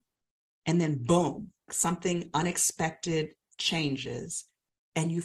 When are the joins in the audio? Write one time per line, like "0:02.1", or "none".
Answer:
0:01.7